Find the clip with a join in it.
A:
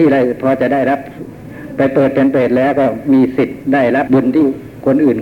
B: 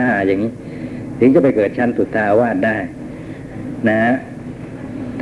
A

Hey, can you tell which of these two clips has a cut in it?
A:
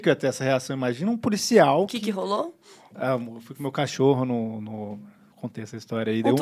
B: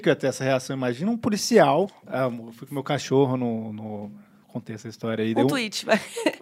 B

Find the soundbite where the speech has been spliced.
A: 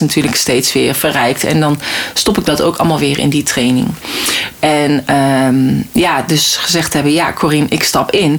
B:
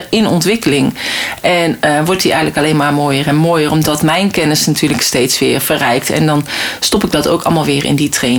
A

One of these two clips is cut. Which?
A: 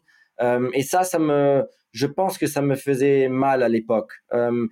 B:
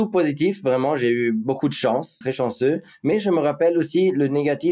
B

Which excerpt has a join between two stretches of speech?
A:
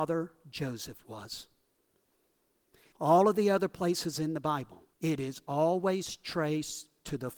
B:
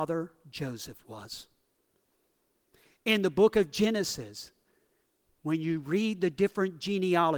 A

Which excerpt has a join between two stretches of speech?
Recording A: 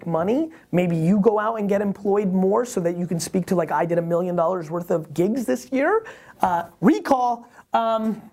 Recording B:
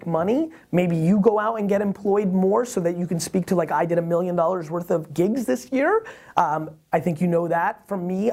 A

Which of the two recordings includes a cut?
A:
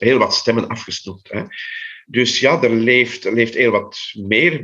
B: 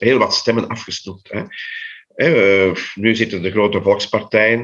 A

